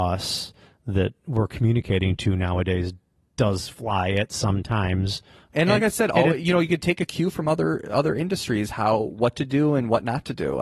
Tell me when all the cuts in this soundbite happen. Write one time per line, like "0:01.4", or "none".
none